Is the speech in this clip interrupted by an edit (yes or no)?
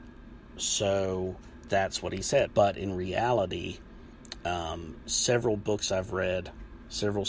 yes